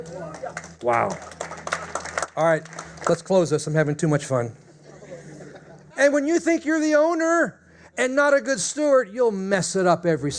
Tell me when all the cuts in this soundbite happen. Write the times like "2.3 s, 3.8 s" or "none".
5.9 s